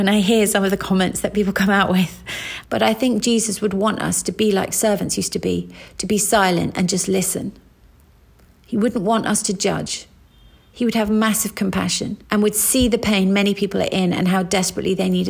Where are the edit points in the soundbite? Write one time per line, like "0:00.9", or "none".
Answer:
0:02.6
0:12.2